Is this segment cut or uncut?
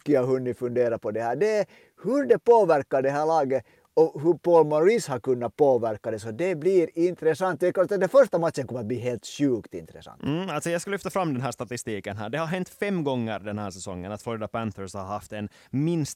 uncut